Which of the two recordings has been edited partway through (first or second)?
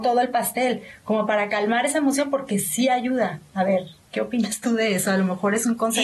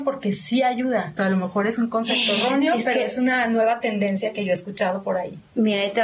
second